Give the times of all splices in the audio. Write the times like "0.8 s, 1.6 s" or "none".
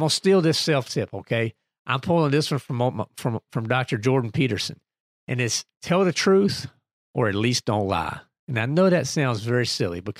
none